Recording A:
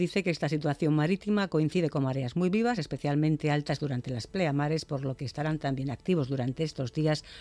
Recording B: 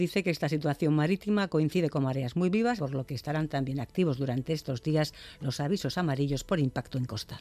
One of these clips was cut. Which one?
B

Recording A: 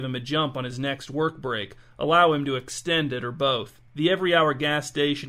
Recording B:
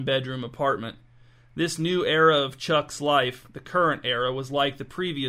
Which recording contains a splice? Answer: A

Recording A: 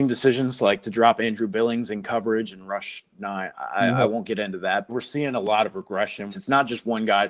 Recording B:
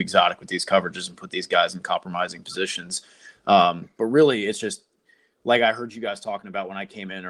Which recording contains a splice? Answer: A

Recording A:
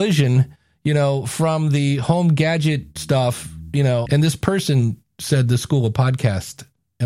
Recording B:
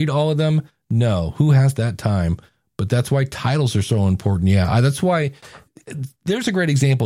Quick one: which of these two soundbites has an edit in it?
A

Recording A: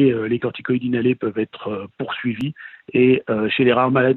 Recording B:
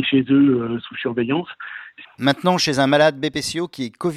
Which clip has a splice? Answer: B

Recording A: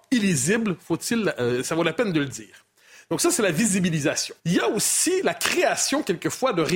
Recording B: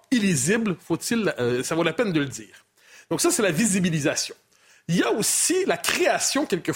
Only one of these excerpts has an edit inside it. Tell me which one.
A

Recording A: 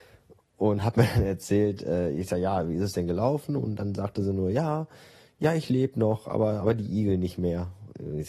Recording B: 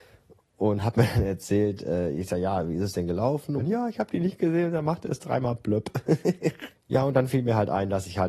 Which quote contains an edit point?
B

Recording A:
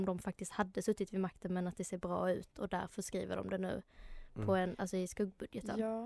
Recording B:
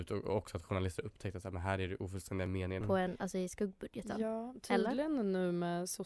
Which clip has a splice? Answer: B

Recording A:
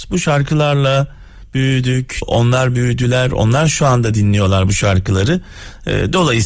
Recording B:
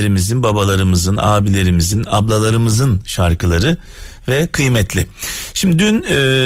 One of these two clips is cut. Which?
A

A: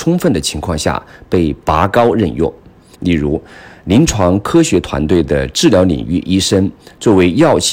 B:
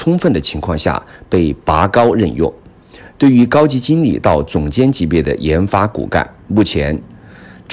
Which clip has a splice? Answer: A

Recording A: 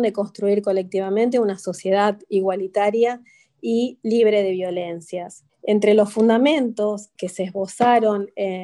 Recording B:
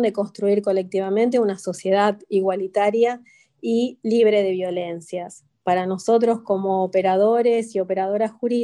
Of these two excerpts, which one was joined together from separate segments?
A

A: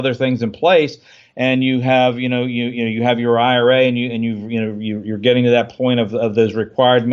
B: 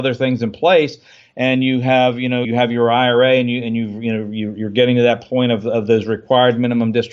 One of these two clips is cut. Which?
B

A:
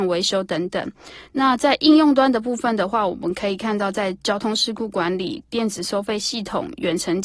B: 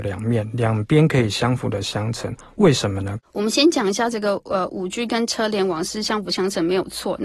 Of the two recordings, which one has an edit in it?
B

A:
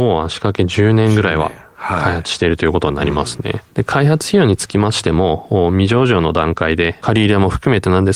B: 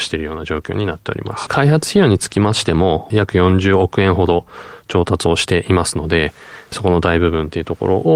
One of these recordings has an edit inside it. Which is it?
B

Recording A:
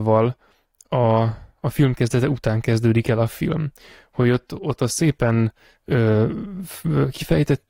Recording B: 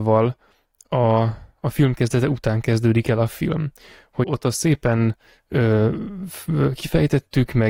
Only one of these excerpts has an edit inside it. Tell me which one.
B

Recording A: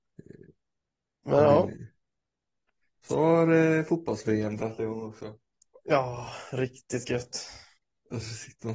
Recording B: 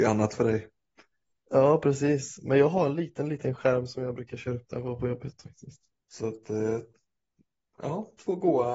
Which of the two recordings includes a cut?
B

